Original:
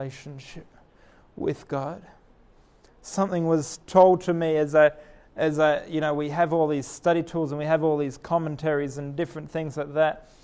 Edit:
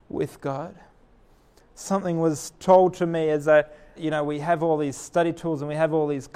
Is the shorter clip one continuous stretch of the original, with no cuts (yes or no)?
no